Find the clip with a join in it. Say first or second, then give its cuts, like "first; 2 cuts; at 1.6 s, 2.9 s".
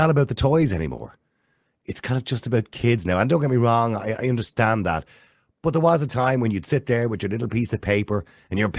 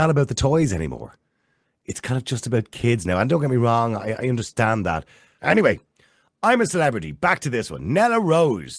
second; 1 cut; at 5.4 s